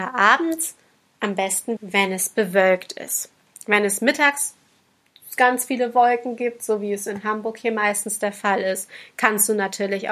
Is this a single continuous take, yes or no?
no